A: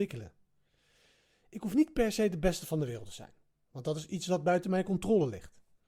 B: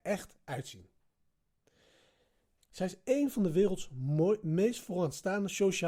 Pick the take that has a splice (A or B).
B